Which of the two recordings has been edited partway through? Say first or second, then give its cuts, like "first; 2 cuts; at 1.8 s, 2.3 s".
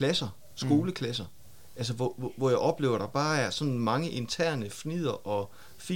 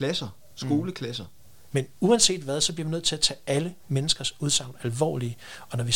second; 1 cut; at 1.7 s